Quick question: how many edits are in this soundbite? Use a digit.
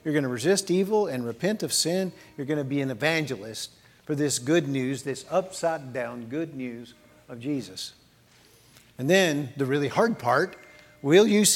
0